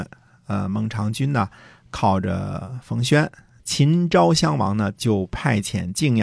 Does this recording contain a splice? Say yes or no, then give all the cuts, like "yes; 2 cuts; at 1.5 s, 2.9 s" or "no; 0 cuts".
yes; 2 cuts; at 3.6 s, 4.9 s